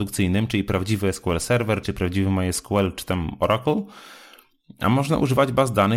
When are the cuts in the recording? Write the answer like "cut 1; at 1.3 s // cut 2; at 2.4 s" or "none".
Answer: cut 1; at 1.8 s